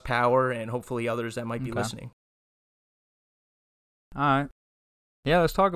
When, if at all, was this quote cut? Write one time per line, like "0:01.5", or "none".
none